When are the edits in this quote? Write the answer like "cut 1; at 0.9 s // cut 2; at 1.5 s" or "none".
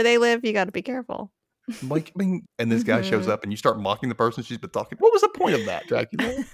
cut 1; at 2.4 s // cut 2; at 5.0 s

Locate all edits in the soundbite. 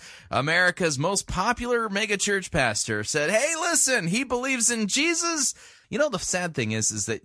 cut 1; at 5.8 s

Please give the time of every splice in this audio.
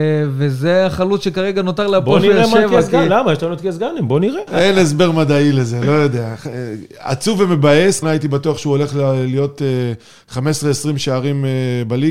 cut 1; at 4.5 s // cut 2; at 8.0 s

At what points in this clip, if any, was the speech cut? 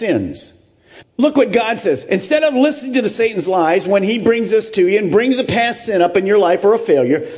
cut 1; at 1.0 s

